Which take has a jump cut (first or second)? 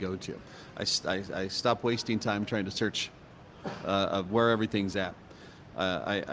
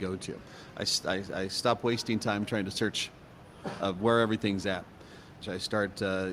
second